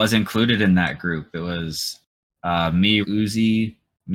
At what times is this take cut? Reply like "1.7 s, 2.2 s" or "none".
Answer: 3.0 s